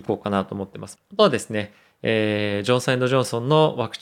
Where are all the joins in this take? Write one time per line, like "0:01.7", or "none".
0:01.0